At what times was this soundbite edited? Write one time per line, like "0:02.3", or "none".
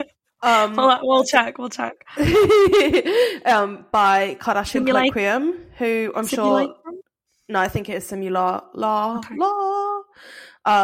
none